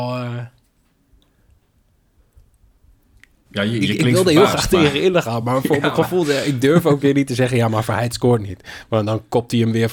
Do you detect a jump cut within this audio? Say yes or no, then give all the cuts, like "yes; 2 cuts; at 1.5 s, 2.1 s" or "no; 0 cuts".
no; 0 cuts